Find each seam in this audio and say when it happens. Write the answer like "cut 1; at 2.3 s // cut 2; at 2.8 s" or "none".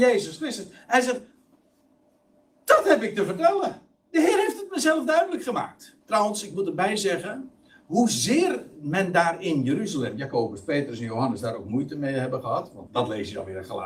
cut 1; at 6.0 s // cut 2; at 12.9 s